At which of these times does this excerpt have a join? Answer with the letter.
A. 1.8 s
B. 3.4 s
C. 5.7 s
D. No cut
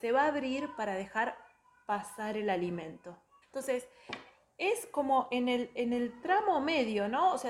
B